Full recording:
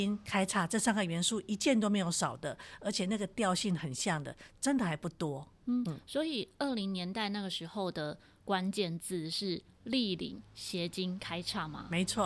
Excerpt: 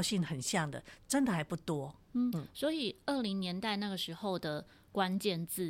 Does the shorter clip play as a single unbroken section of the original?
yes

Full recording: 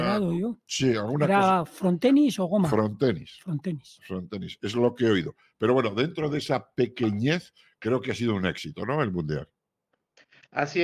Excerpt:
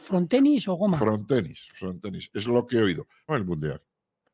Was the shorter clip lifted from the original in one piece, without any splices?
no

